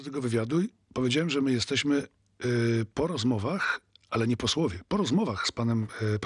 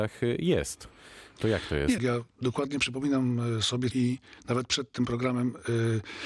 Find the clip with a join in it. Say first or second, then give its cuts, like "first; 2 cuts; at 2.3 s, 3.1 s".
second; 2 cuts; at 2.0 s, 3.9 s